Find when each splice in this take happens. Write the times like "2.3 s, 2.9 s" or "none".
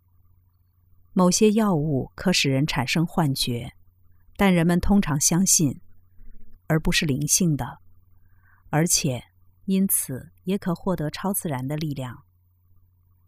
6.6 s, 9.5 s